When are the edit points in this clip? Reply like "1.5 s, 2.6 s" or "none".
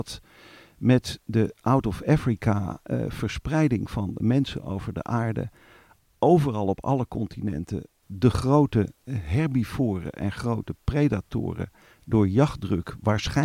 none